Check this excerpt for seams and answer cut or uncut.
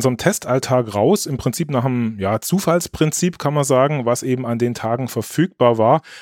uncut